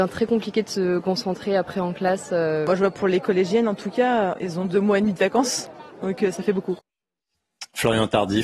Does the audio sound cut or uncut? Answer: uncut